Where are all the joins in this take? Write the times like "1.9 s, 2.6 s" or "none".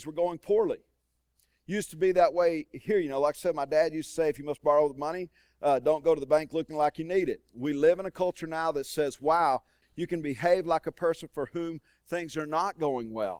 9.8 s